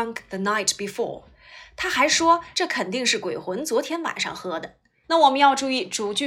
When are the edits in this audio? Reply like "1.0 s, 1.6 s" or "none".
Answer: 2.5 s, 5.0 s